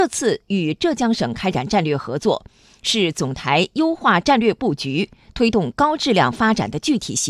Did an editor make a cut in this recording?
no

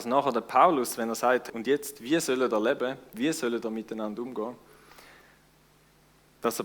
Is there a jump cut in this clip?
yes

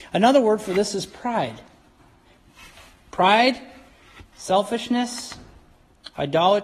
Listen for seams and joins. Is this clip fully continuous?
yes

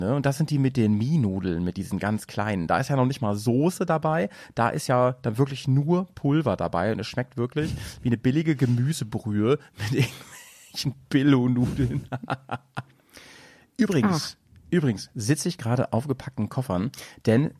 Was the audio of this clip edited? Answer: no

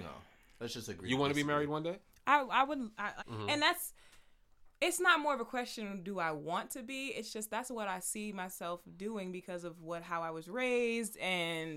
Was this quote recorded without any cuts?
no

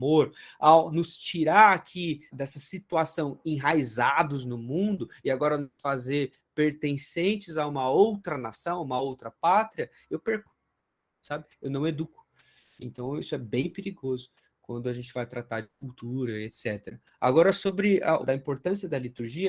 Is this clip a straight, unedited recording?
no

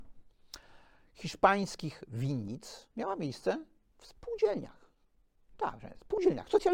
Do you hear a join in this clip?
yes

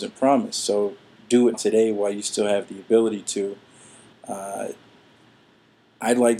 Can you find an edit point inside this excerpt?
yes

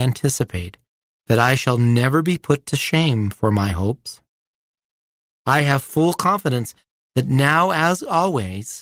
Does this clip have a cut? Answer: no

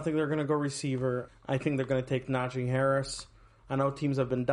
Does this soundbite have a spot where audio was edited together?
yes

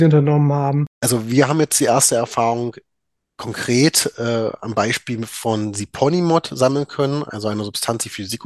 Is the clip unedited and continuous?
yes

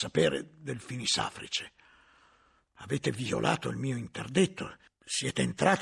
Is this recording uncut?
yes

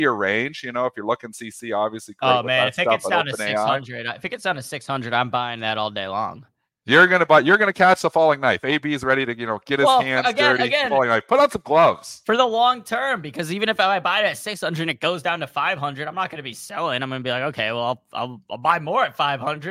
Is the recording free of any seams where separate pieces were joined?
no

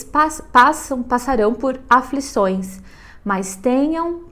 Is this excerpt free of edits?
yes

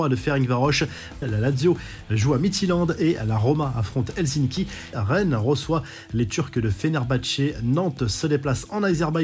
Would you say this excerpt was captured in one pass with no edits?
no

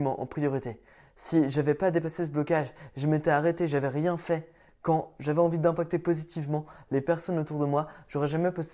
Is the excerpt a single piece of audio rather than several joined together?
yes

